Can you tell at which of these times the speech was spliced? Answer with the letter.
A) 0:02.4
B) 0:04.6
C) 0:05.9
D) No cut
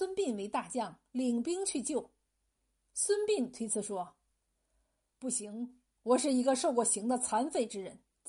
D